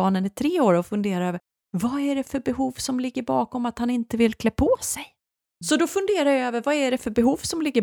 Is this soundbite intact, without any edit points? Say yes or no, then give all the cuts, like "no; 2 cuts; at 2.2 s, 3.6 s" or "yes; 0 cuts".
no; 1 cut; at 5.6 s